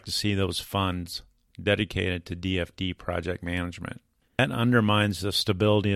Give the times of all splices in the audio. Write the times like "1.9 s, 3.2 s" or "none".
4.3 s